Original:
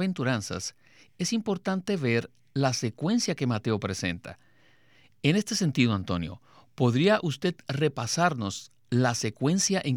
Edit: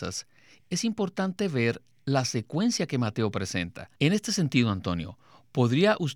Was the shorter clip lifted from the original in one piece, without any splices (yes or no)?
no